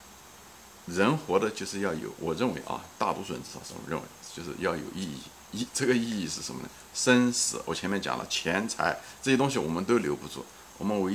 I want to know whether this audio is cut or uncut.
uncut